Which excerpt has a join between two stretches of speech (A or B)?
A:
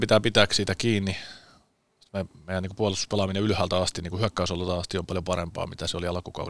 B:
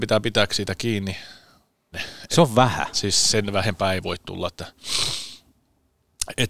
B